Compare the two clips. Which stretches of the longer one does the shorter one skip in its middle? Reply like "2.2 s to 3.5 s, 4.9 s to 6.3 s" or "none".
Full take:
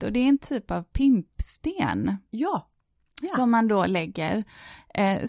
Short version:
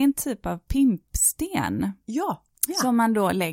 2.8 s to 3.1 s